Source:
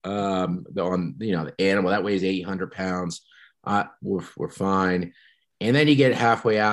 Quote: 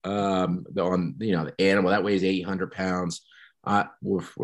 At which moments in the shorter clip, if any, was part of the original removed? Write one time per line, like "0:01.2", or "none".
none